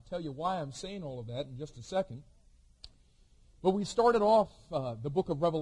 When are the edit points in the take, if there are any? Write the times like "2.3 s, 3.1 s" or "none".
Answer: none